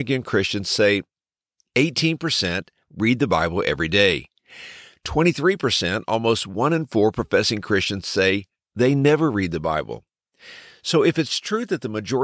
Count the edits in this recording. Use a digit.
1